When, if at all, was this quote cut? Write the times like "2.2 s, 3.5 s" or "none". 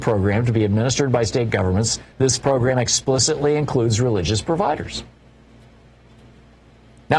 none